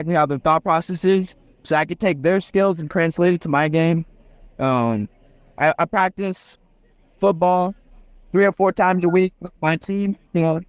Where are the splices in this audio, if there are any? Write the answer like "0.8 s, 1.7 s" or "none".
none

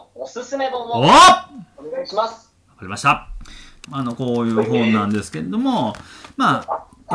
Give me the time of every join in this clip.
3.8 s

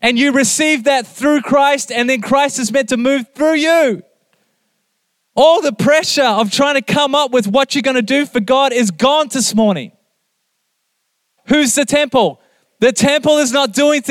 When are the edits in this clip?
11.4 s, 12.6 s

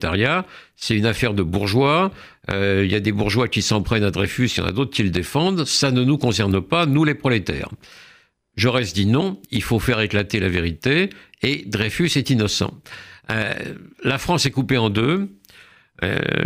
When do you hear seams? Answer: none

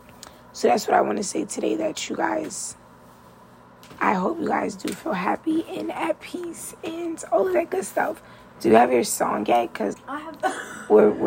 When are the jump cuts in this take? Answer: 9.9 s

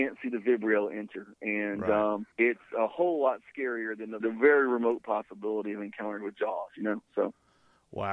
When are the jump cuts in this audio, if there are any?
2.3 s, 4.2 s

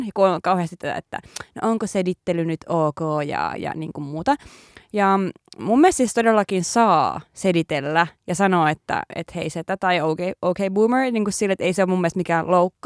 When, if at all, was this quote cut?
none

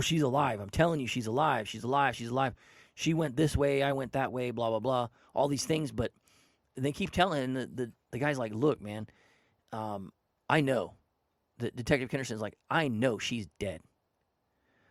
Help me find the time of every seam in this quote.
none

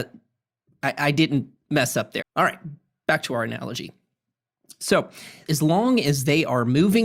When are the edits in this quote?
2.2 s, 5.5 s

